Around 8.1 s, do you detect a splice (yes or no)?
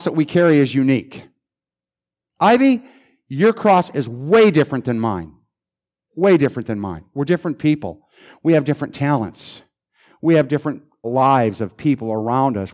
no